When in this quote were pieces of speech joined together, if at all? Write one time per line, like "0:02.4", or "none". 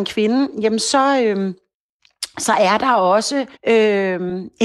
0:03.6

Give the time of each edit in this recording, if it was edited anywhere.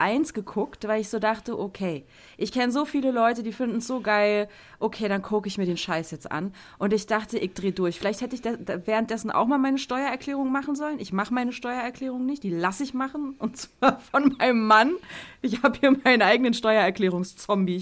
none

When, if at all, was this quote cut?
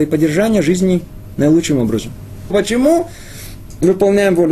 0:02.5

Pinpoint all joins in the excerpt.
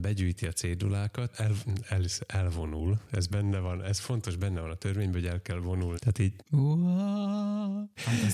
0:01.3
0:05.9

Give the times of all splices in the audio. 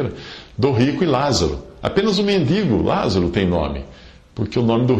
none

